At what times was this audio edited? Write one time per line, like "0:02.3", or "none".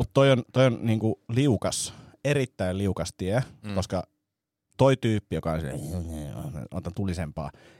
none

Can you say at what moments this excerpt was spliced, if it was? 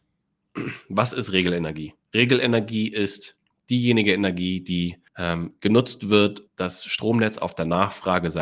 0:05.1
0:06.5

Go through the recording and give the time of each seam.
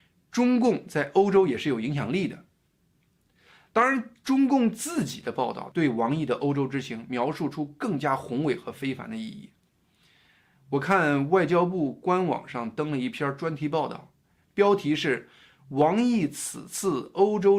none

